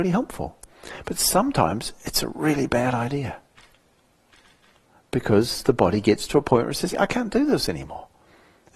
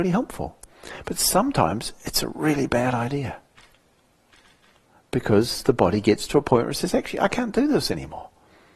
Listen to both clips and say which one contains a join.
first; 1 cut; at 6.9 s

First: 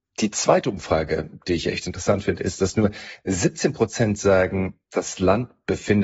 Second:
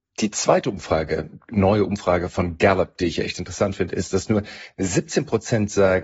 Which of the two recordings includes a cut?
first; 1 cut; at 1.4 s

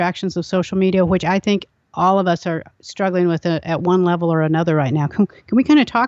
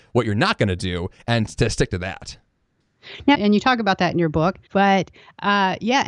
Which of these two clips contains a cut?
second; 2 cuts; at 3.3 s, 4.7 s

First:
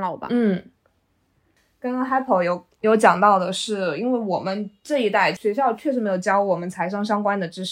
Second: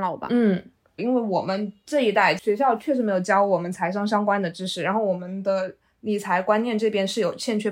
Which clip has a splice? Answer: second; 1 cut; at 1.0 s

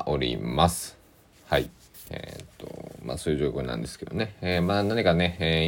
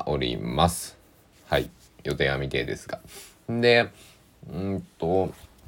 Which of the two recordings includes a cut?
first; 1 cut; at 1.9 s

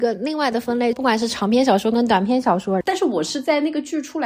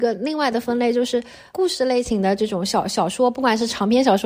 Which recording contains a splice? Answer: first; 2 cuts; at 0.9 s, 2.8 s

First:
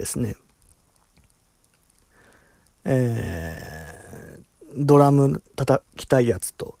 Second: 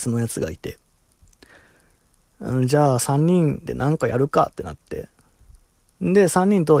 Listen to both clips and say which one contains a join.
first; 1 cut; at 5.9 s

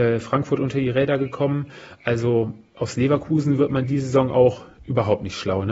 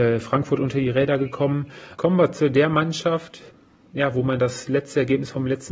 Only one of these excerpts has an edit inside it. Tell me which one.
second; 1 cut; at 2.0 s

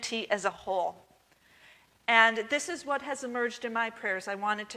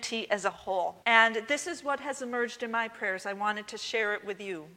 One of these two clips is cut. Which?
second; 1 cut; at 1.0 s

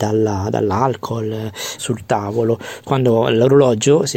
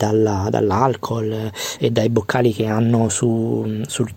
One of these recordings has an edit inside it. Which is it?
first; 2 cuts; at 1.8 s, 2.8 s

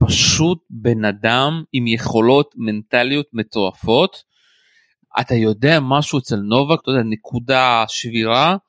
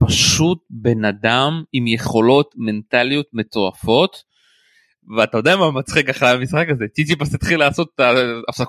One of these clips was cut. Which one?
first; 2 cuts; at 5.0 s, 6.8 s

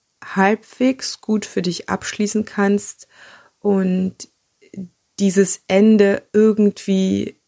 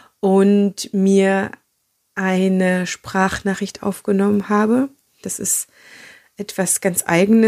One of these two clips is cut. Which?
second; 1 cut; at 5.2 s

